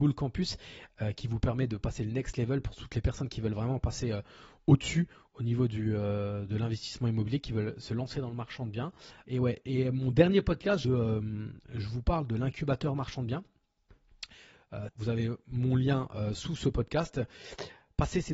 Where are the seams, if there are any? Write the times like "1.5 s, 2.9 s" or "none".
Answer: 9.2 s, 10.8 s, 14.9 s